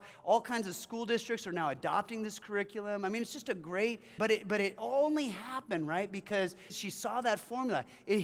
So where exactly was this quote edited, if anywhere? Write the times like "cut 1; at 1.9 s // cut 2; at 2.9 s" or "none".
cut 1; at 4.2 s // cut 2; at 6.7 s

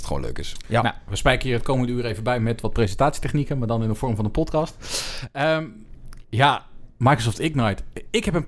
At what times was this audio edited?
none

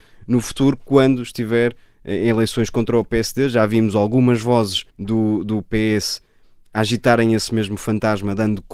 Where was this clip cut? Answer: cut 1; at 4.9 s

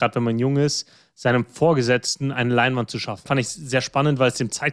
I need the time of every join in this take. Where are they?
cut 1; at 3.3 s

